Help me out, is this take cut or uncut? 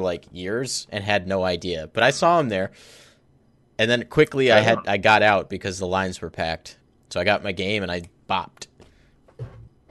uncut